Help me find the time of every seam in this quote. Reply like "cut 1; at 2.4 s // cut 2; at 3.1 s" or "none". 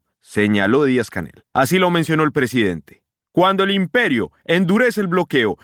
cut 1; at 1.5 s